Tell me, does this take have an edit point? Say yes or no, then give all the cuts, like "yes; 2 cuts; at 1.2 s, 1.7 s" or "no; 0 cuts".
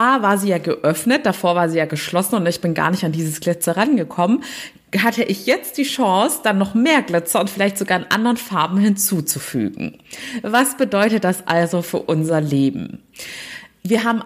no; 0 cuts